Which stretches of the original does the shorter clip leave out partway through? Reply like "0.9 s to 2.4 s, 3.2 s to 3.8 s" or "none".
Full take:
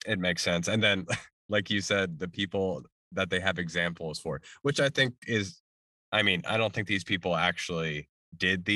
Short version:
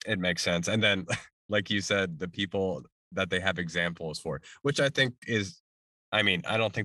none